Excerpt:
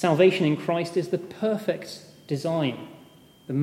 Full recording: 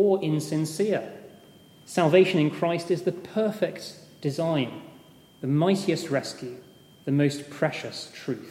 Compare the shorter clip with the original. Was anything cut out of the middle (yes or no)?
no